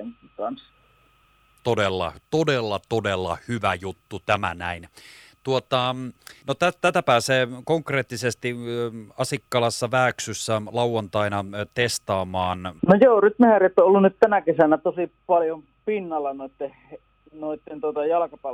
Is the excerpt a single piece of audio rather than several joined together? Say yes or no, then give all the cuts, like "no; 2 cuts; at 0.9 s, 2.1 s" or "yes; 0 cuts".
no; 2 cuts; at 6.4 s, 12.8 s